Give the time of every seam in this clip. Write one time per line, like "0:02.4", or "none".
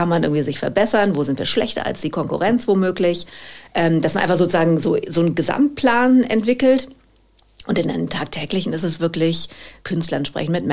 0:09.8

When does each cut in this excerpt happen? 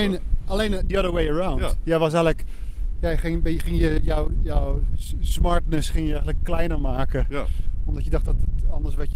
none

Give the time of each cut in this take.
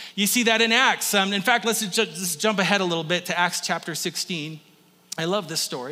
none

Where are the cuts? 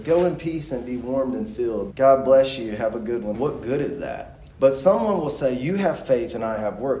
0:01.9
0:03.3
0:04.5

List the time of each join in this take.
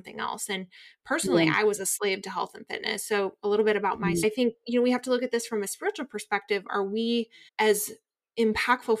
0:04.2
0:07.5

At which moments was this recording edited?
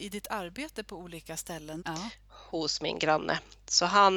0:01.8

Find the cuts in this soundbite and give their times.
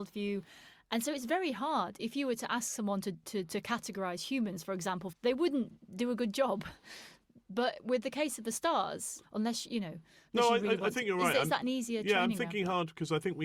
0:05.1
0:09.2

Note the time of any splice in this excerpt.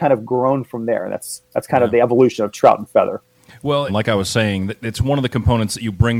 0:03.9

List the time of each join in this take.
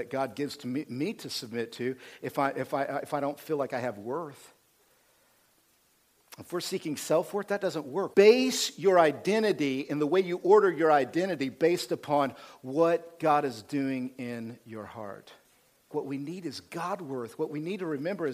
0:08.1
0:15.9

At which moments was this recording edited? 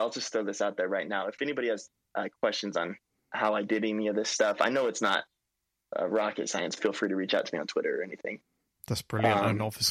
0:06.8

